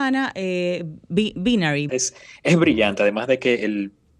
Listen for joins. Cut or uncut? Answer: cut